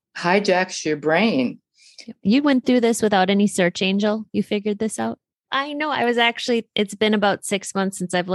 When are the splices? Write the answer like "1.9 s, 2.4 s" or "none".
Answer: 2.2 s, 5.5 s

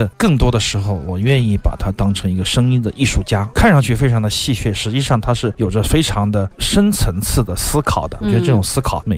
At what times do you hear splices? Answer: 3.5 s

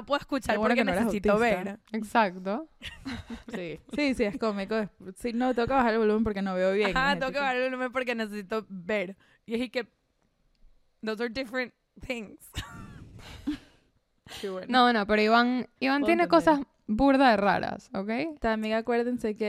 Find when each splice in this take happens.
15.8 s

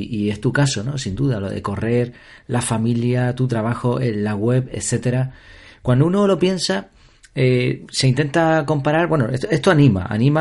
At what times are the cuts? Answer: none

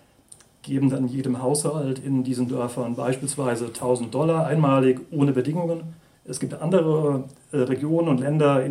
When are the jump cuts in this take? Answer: 6.1 s

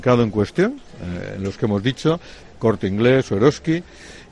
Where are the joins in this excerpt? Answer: 2.4 s

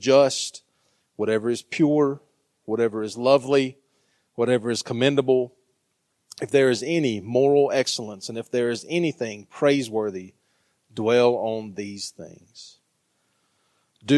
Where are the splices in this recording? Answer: none

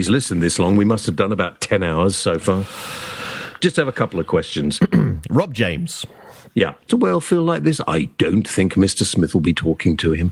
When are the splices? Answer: 6.9 s

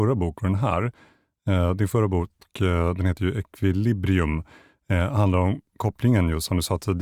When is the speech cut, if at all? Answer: none

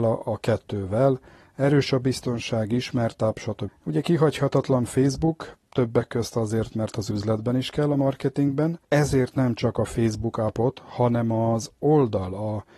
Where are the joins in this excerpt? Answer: 3.7 s, 8.8 s

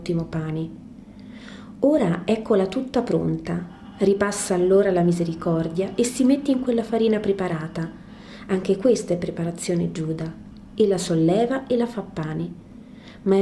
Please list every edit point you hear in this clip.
none

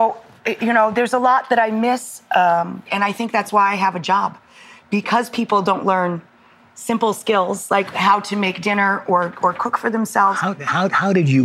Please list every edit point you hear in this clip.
2.9 s

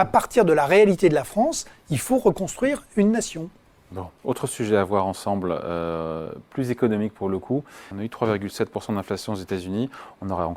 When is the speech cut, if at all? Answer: 7.9 s

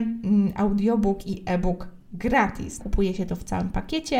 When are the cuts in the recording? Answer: 2.8 s

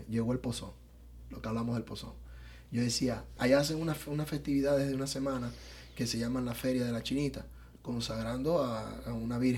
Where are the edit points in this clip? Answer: 3.4 s

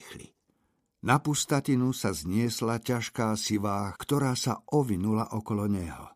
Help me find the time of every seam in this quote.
3.9 s

